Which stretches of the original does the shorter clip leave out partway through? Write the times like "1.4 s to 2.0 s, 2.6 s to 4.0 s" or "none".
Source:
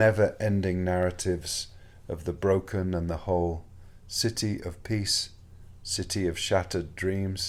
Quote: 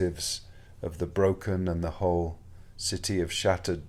4.0 s to 5.8 s

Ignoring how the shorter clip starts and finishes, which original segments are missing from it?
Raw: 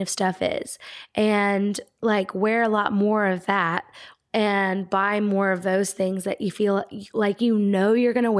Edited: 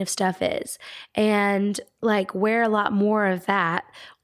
none

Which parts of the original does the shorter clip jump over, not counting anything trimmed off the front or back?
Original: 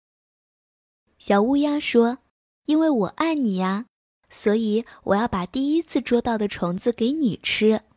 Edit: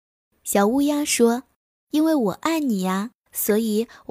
3.9 s to 4.2 s

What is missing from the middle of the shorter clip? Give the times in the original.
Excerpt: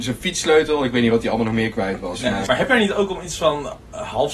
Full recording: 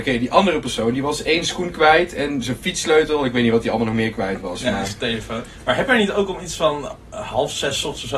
4.9 s to 5.7 s

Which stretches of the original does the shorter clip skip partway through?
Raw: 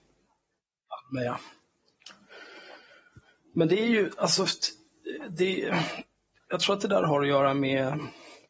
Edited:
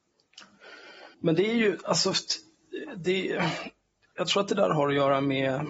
2.8 s to 3.5 s

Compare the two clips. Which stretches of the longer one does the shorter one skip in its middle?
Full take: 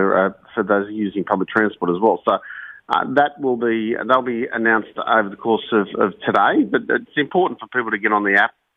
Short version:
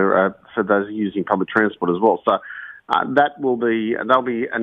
none

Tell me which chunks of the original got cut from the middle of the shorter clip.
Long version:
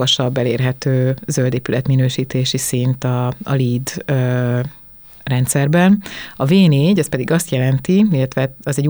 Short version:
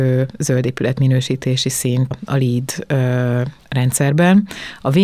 3.0 s to 3.3 s, 4.8 s to 5.1 s

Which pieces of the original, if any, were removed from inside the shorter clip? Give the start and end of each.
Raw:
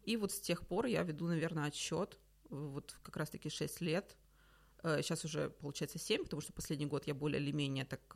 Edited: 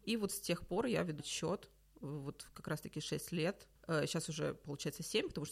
1.2 s to 1.7 s, 4.2 s to 4.7 s

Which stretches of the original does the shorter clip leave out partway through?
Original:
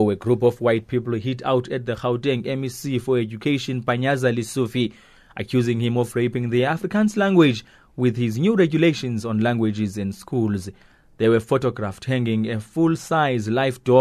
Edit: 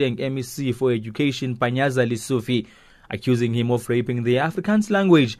none

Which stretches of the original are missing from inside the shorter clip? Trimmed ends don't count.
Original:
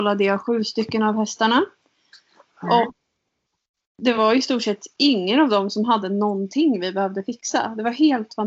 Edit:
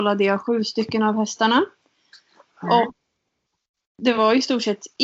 none

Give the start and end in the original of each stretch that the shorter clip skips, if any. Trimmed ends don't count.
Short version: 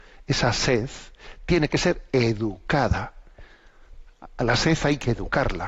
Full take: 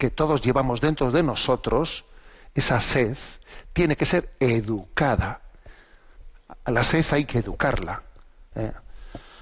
none

